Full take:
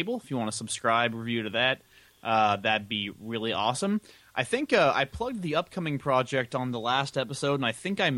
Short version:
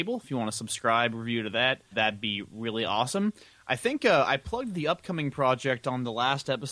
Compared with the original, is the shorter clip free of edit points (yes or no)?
no